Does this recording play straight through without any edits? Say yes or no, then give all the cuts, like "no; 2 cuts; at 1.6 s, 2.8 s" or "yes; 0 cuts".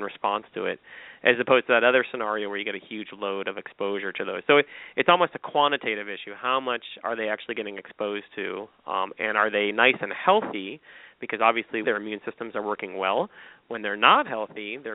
no; 1 cut; at 11.8 s